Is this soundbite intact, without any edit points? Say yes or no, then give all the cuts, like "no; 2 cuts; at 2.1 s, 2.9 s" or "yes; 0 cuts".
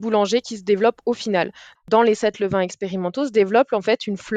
no; 1 cut; at 1.7 s